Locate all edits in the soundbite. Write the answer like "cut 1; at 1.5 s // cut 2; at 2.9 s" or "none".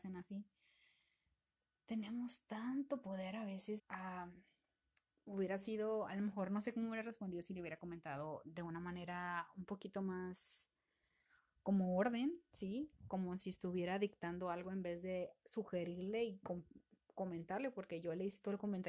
cut 1; at 3.8 s